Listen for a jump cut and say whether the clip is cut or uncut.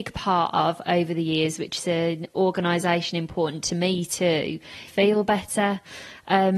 cut